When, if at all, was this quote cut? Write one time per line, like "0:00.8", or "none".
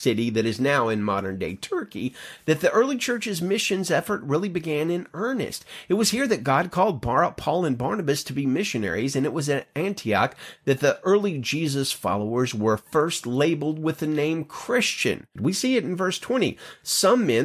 0:15.4